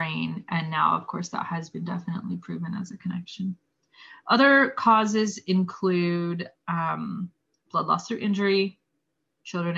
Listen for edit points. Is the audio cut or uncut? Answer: uncut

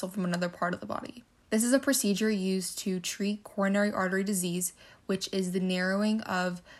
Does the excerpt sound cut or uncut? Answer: cut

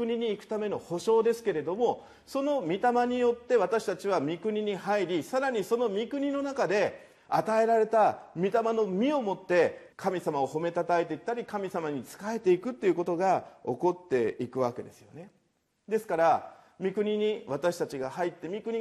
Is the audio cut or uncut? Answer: cut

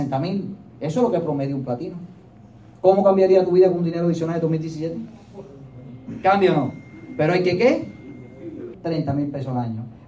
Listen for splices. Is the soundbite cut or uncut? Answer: cut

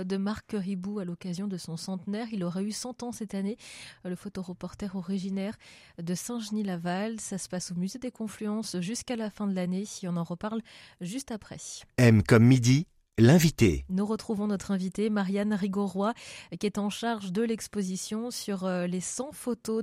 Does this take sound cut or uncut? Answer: uncut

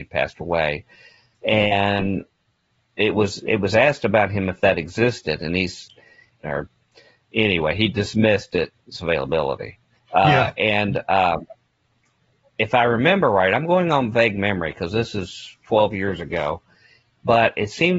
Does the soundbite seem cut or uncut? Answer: cut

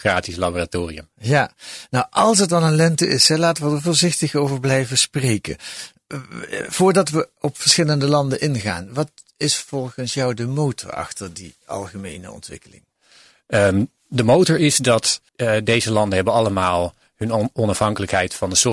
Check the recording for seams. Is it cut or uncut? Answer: cut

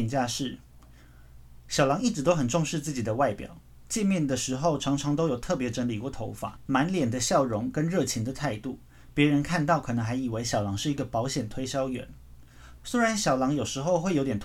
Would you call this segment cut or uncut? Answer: cut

